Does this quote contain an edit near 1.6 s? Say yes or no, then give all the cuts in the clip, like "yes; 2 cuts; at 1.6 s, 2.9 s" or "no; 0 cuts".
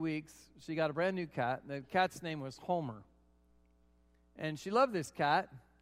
no; 0 cuts